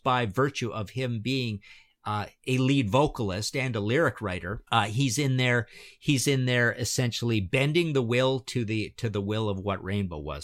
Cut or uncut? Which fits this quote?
cut